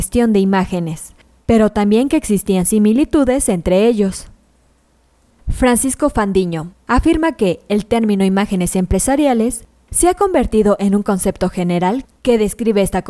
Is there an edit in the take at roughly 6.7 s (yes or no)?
yes